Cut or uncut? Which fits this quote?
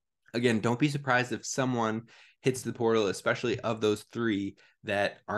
uncut